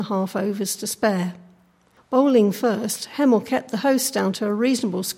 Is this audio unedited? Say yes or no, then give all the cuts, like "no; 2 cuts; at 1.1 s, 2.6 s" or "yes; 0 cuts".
no; 1 cut; at 2.0 s